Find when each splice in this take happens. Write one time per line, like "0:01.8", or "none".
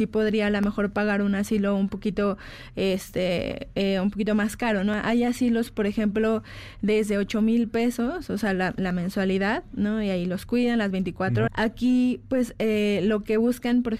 0:11.5